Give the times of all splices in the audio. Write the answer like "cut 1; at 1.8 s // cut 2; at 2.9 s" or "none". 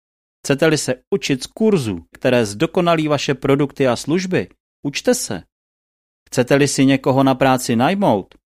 cut 1; at 2.1 s

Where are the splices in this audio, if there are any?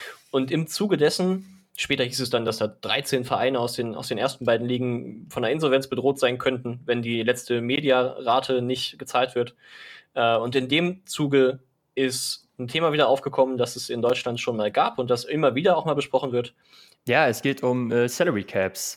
cut 1; at 17.0 s

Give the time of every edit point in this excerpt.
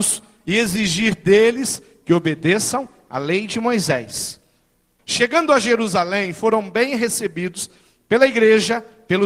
cut 1; at 5.0 s

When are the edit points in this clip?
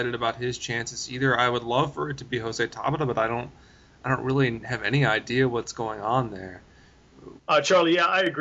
cut 1; at 7.4 s

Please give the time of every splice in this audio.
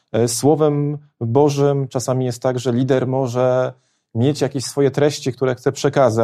none

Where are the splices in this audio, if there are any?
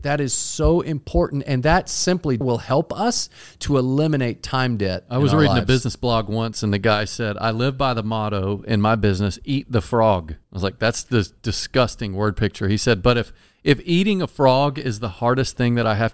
cut 1; at 2.4 s // cut 2; at 10.4 s

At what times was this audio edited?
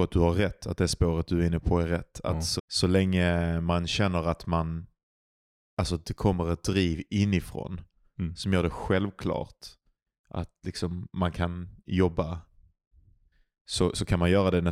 cut 1; at 2.6 s

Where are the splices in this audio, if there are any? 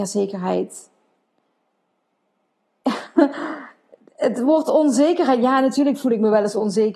none

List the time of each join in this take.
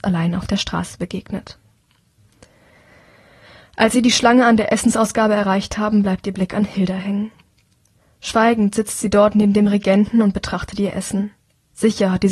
none

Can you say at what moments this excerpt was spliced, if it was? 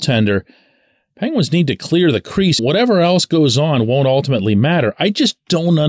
cut 1; at 2.6 s

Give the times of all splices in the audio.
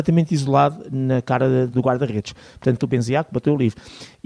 cut 1; at 1.7 s // cut 2; at 2.8 s

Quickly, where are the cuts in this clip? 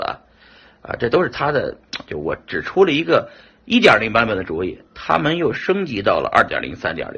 none

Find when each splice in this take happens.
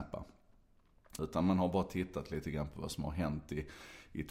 cut 1; at 1.2 s

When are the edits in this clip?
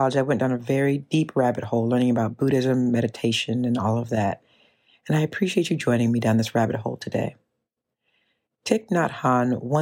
none

